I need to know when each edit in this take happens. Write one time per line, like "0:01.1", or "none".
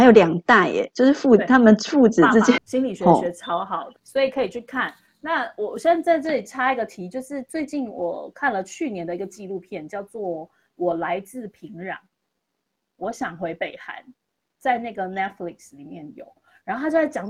0:02.6
0:04.0